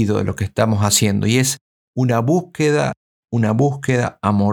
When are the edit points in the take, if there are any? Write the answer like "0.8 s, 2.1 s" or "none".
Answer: none